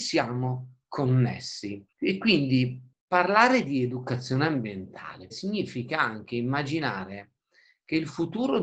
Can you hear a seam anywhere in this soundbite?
yes; 2 cuts; at 1.9 s, 5.3 s

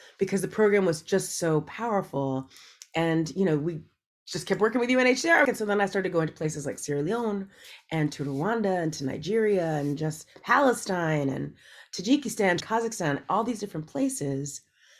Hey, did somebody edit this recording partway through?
yes; 2 cuts; at 5.4 s, 12.6 s

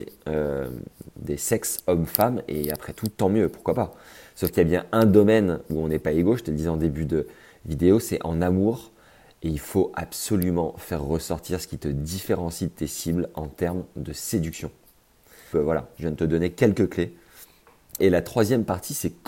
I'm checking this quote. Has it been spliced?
yes; 2 cuts; at 15.5 s, 18.0 s

